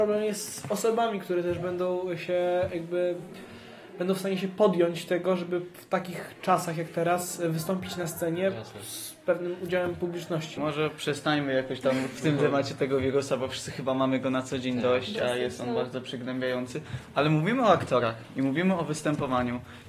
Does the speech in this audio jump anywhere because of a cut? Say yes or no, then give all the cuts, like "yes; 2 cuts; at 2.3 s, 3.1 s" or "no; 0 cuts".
yes; 1 cut; at 10.6 s